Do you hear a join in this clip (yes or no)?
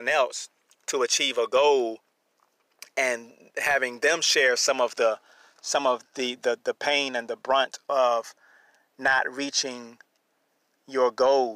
no